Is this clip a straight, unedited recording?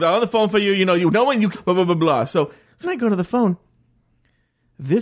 no; 2 cuts; at 1.5 s, 2.8 s

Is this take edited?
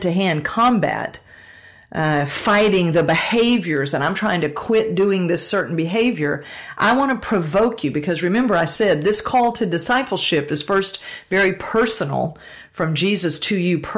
no; 0 cuts

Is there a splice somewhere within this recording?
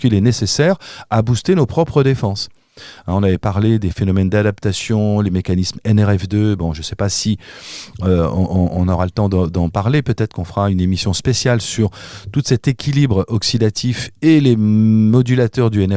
no; 0 cuts

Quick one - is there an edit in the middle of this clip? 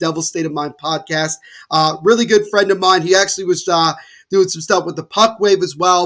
yes; 1 cut; at 3.6 s

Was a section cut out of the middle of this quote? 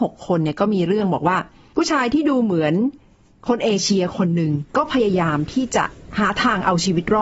yes; 1 cut; at 4.7 s

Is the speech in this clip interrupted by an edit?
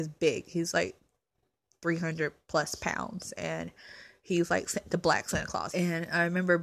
yes; 1 cut; at 5.7 s

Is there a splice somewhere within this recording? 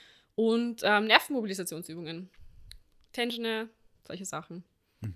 yes; 1 cut; at 4.0 s

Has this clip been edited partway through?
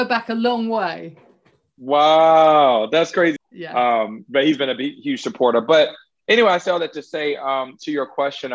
yes; 1 cut; at 3.4 s

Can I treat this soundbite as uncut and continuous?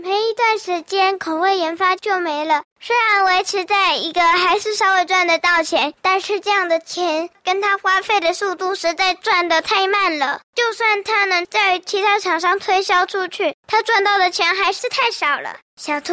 no; 2 cuts; at 2.7 s, 6.0 s

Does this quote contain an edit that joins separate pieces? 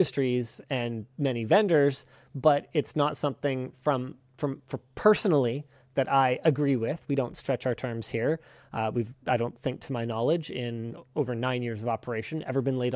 no; 0 cuts

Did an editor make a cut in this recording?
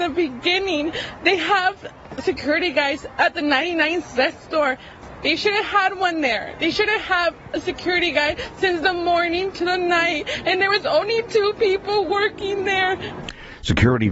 no; 0 cuts

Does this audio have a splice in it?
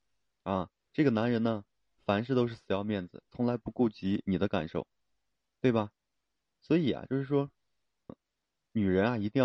yes; 2 cuts; at 6.5 s, 8.1 s

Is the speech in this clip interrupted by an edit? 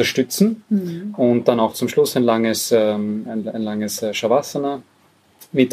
no; 0 cuts

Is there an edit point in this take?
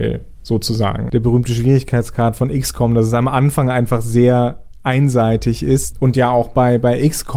yes; 2 cuts; at 1.1 s, 5.9 s

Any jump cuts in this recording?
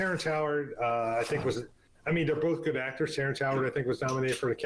no; 0 cuts

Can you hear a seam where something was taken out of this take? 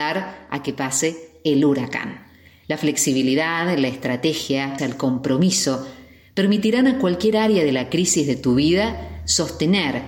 yes; 1 cut; at 4.8 s

